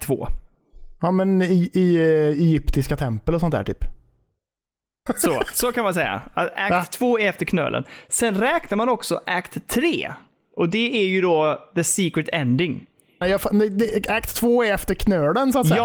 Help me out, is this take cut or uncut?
cut